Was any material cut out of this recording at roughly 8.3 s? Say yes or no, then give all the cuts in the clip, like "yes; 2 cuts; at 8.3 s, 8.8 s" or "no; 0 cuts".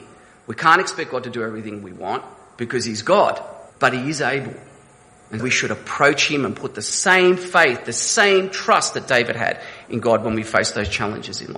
no; 2 cuts; at 3.7 s, 5.4 s